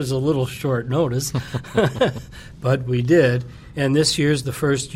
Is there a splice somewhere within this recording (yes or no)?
no